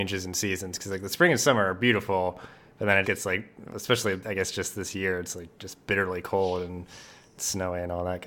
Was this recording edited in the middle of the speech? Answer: yes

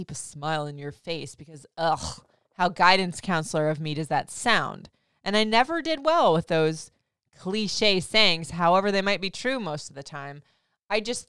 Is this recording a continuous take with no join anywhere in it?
yes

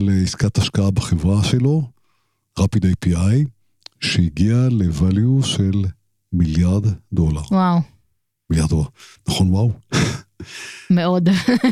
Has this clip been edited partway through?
no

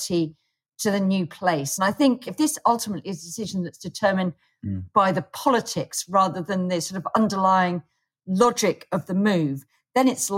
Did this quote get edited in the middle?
no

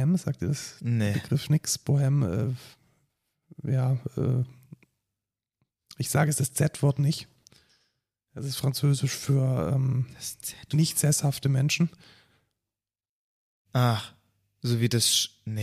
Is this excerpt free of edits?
yes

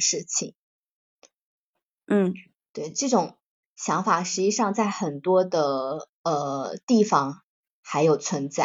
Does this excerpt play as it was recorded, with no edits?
no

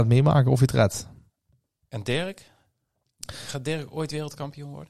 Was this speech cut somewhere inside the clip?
no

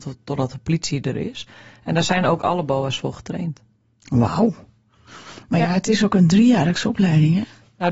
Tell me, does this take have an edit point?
no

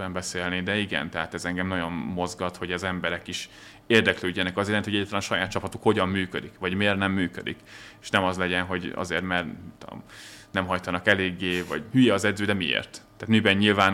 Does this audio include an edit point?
no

